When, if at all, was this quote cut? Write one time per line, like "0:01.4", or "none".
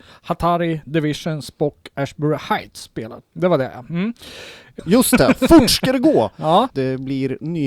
0:03.2
0:04.8
0:06.7